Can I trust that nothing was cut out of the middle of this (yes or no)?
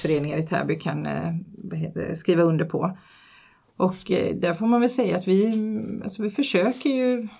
yes